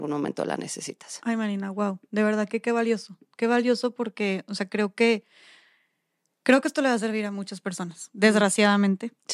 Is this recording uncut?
yes; 0 cuts

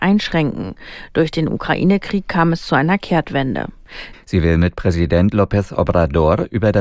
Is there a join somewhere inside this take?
yes; 1 cut; at 4.1 s

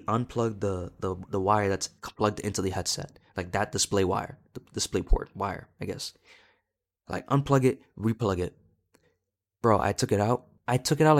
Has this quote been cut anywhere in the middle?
no; 0 cuts

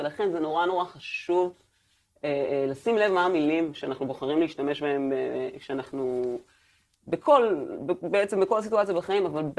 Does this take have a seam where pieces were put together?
no; 0 cuts

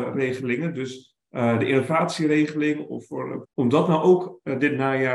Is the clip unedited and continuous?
no; 1 cut; at 3.4 s

